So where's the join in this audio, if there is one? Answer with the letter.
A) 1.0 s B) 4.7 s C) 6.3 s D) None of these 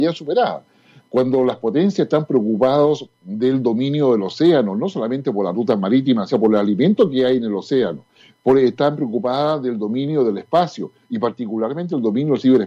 C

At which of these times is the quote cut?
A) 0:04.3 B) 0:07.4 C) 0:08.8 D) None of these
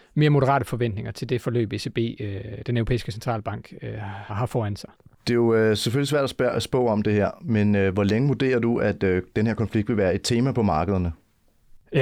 A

